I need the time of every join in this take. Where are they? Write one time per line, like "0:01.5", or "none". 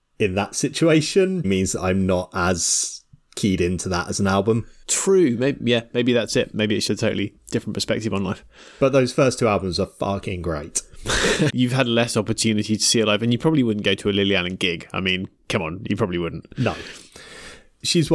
0:01.4
0:06.9
0:11.5